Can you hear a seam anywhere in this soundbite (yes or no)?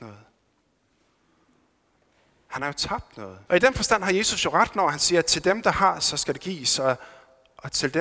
yes